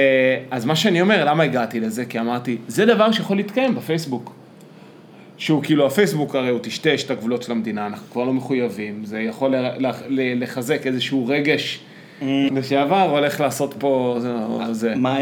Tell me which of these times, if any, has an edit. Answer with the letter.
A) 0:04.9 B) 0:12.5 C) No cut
B